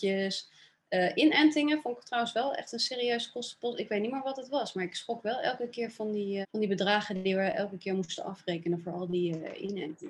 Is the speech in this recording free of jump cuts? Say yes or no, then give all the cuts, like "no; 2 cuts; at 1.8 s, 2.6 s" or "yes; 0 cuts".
no; 1 cut; at 6.4 s